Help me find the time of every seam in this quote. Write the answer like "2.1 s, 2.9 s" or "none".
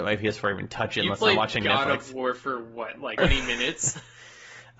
3.2 s